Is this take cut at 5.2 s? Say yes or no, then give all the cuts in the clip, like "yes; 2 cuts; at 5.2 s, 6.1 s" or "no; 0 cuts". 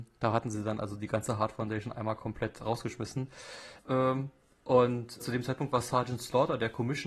yes; 2 cuts; at 3.8 s, 5.2 s